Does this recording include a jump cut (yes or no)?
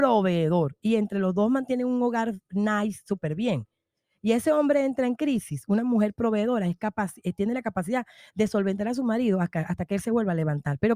no